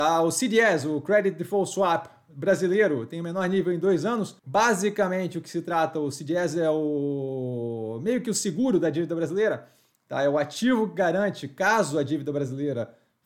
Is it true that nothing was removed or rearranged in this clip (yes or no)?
no